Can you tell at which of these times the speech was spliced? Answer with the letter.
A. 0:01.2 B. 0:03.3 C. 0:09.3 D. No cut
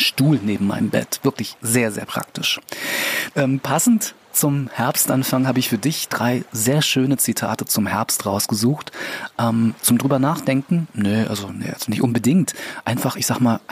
B